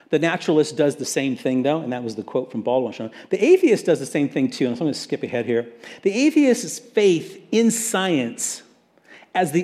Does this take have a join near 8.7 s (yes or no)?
no